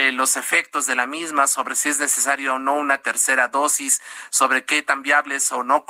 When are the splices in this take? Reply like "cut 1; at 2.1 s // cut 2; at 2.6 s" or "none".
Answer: none

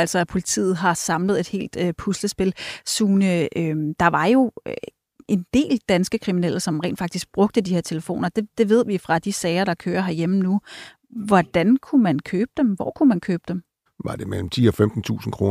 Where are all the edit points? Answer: cut 1; at 13.9 s

